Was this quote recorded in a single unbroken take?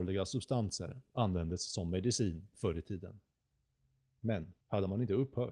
no; 1 cut; at 4.6 s

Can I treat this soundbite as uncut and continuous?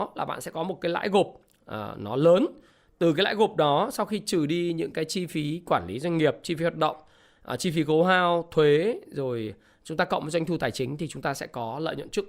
yes; 0 cuts

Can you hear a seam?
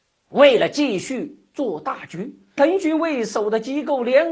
yes; 1 cut; at 2.6 s

